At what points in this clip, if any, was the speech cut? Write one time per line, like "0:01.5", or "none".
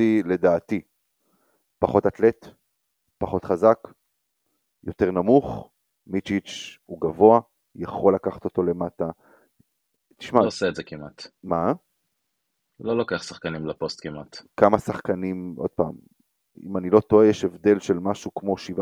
none